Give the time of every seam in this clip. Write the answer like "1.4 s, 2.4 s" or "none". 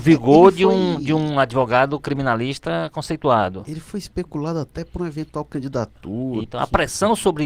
6.4 s